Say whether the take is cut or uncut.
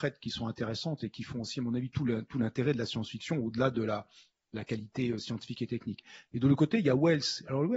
uncut